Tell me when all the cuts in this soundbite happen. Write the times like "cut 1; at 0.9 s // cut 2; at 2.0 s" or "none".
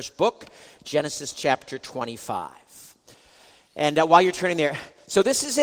none